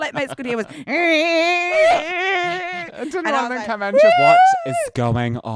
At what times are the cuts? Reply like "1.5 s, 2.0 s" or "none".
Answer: 4.1 s